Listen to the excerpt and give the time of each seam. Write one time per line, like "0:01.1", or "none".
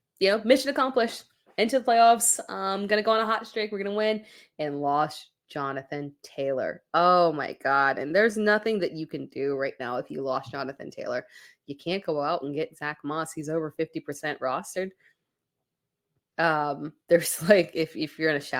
none